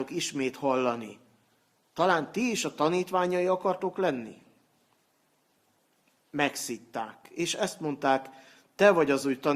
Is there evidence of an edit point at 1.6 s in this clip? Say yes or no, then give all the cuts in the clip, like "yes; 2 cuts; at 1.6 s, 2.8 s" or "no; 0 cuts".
no; 0 cuts